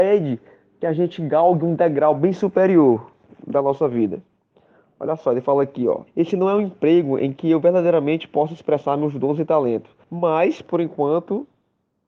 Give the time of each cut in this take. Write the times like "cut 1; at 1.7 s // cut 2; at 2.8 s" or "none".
cut 1; at 6.1 s // cut 2; at 10.0 s